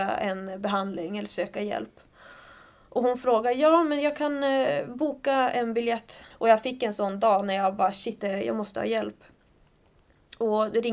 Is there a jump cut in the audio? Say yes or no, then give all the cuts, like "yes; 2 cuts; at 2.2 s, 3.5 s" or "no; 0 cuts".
yes; 2 cuts; at 6.3 s, 8.2 s